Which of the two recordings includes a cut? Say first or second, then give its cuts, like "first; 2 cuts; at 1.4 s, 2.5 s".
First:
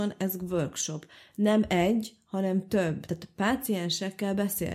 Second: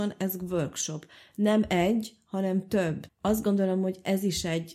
second; 1 cut; at 3.1 s